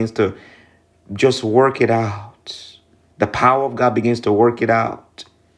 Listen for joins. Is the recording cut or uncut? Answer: uncut